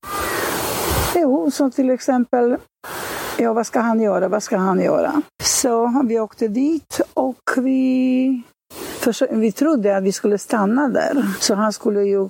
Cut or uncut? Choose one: cut